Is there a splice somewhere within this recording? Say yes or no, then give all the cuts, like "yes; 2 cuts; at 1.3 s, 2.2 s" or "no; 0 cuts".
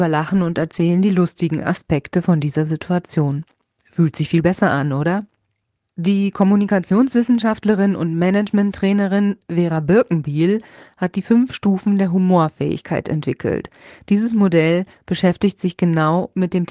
no; 0 cuts